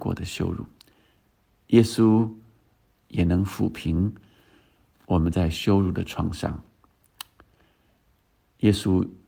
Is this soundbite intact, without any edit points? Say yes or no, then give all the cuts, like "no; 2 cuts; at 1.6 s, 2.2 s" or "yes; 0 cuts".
yes; 0 cuts